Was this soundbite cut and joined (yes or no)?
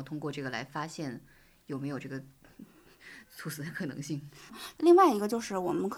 yes